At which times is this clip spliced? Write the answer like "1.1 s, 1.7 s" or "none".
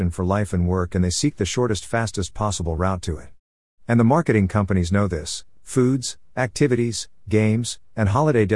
5.6 s